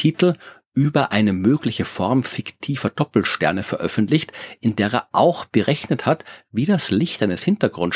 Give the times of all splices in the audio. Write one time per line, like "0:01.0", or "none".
none